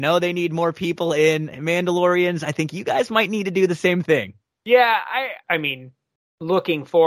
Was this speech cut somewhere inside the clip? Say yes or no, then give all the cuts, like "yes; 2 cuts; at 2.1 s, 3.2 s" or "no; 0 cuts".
yes; 1 cut; at 5.4 s